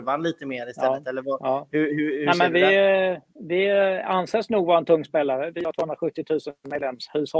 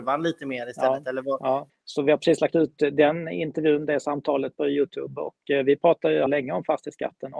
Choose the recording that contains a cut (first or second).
second